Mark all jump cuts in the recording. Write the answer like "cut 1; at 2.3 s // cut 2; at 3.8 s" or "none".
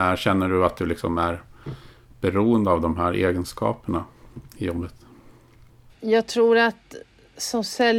none